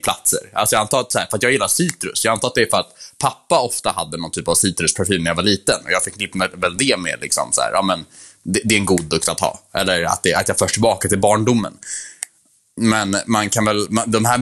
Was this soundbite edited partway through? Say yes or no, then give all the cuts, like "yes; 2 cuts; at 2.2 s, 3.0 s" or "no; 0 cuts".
no; 0 cuts